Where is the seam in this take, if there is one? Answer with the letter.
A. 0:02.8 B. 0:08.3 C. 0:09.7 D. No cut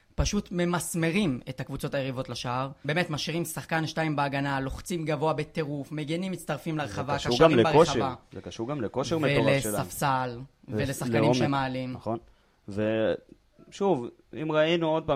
A